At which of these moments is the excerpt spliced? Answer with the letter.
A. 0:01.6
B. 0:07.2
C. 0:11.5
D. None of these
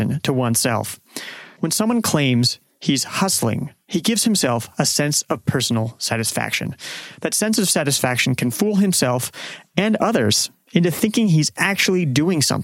A